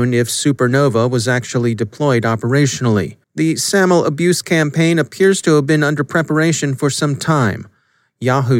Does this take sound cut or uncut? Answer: cut